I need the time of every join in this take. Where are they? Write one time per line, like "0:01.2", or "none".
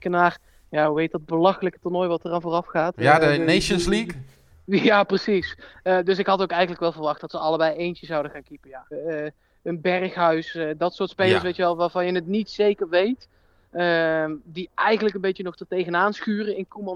0:08.9